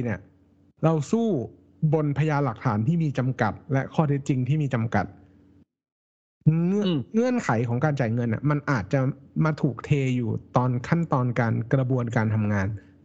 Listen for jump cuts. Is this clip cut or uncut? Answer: uncut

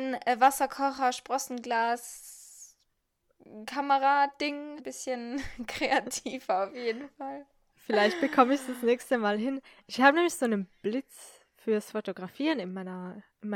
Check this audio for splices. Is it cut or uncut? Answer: cut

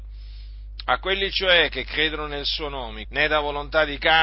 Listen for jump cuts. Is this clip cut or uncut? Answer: cut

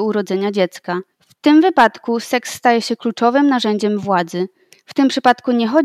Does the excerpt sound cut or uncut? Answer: cut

